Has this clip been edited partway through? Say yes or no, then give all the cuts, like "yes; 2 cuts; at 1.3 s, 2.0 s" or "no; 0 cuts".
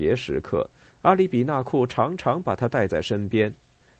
no; 0 cuts